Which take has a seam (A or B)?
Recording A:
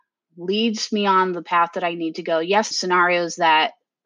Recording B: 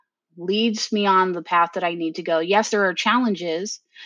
A